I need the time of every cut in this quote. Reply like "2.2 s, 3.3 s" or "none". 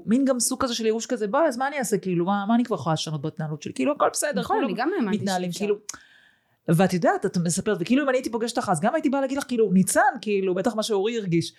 none

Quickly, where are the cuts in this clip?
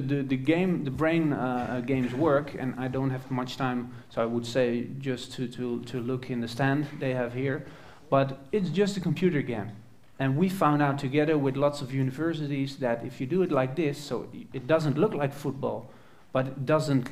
10.1 s

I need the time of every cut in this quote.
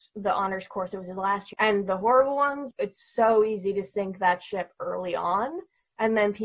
1.5 s, 2.7 s

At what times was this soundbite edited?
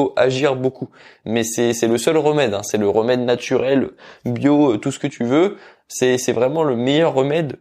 none

